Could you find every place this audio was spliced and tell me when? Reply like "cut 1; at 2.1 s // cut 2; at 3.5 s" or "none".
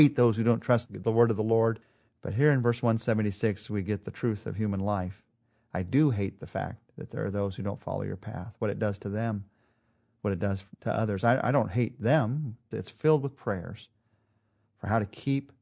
cut 1; at 12.7 s